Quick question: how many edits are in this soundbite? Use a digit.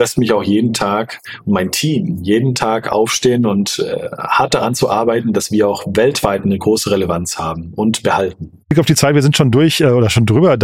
0